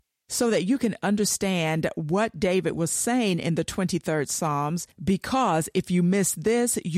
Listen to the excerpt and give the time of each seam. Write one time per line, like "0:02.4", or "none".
none

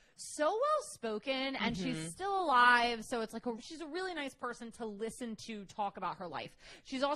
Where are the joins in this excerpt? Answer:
0:03.6

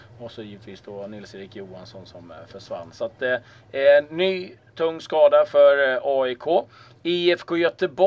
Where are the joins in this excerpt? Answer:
none

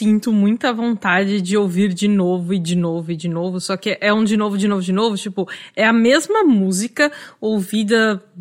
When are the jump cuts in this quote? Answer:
none

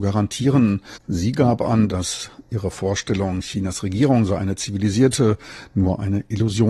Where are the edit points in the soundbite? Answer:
0:01.9

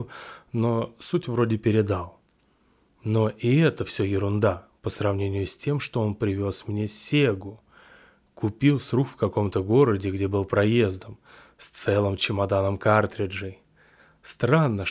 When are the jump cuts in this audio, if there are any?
none

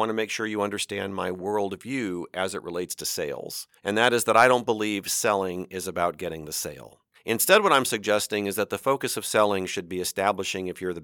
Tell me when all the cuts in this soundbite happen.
0:03.8
0:07.1

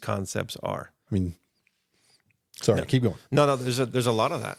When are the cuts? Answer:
0:01.1

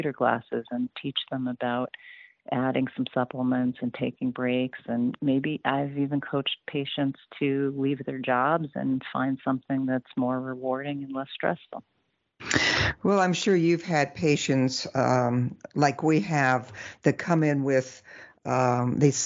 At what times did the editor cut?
none

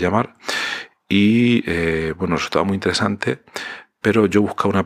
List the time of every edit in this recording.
none

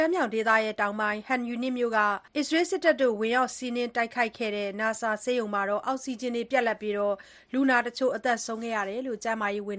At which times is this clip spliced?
0:02.3

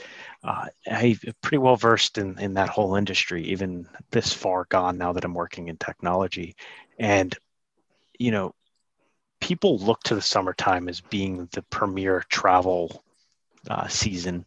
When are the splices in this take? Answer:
none

